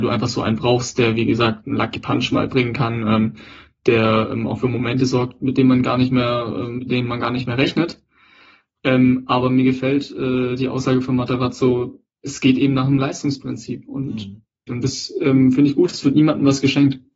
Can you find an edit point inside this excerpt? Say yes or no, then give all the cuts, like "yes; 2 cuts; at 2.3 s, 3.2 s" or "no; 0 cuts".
yes; 1 cut; at 14.7 s